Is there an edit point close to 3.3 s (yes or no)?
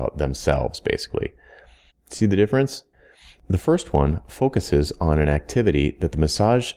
no